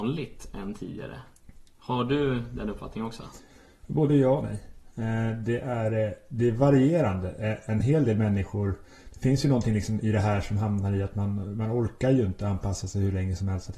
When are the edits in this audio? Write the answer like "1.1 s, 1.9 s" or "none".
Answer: none